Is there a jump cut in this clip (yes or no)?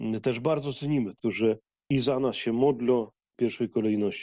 yes